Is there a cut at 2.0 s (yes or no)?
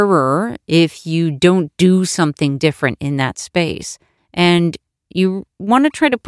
no